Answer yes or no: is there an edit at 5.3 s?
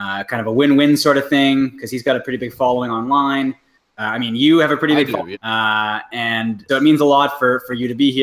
yes